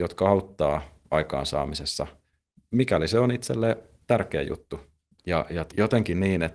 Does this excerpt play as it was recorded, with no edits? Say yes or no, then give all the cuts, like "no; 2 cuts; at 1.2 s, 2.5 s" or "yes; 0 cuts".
no; 1 cut; at 5.2 s